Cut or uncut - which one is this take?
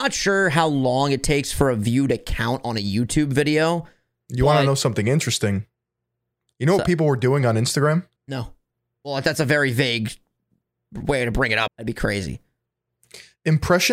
cut